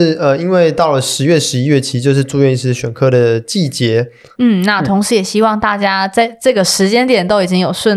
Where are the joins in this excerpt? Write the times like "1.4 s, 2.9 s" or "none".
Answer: 4.3 s